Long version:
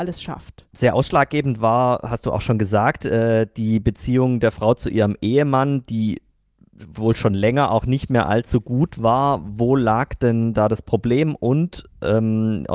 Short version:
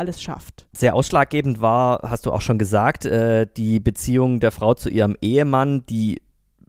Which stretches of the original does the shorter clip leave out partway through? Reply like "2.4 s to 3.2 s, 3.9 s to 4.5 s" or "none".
none